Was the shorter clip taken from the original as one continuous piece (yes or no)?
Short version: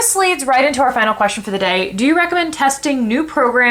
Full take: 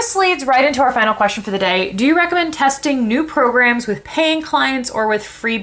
yes